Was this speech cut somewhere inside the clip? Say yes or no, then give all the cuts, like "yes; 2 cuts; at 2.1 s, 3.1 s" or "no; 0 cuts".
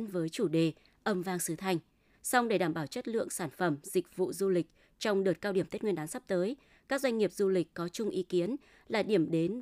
yes; 1 cut; at 2.1 s